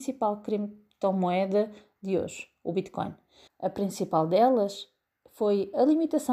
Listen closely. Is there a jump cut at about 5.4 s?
no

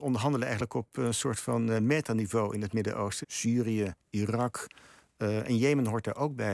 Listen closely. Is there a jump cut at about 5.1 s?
no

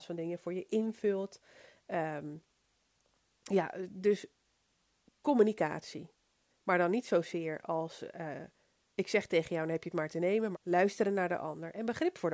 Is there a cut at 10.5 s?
yes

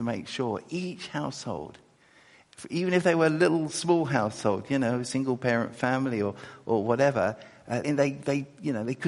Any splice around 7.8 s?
yes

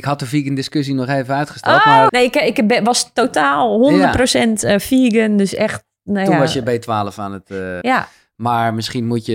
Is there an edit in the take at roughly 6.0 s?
no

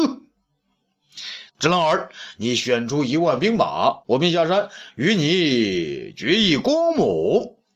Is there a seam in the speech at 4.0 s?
yes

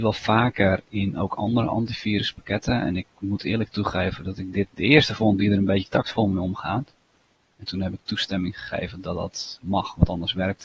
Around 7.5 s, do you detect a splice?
yes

